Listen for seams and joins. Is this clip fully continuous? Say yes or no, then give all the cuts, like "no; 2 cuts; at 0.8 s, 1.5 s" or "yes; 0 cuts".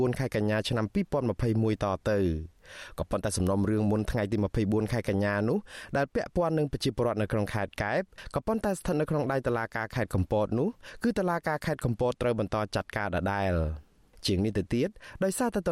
yes; 0 cuts